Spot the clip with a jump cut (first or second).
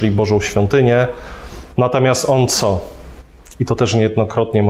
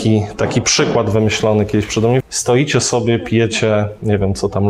second